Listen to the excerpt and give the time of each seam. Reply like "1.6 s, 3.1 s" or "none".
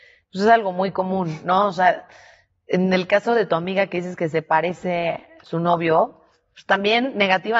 none